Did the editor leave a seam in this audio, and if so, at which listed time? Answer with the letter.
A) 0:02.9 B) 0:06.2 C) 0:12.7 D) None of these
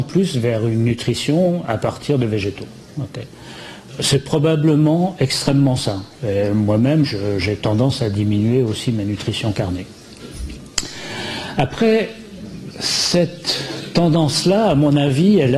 C